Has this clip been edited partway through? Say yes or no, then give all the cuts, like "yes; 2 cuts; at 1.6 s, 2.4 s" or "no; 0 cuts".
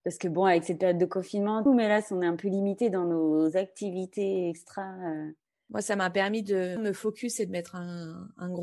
yes; 2 cuts; at 1.7 s, 6.8 s